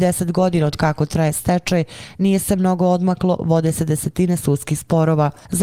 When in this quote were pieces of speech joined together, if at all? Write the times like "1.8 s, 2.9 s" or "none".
none